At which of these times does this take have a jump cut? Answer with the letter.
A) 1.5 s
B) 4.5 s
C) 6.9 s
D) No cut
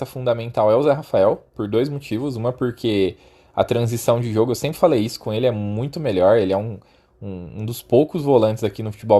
D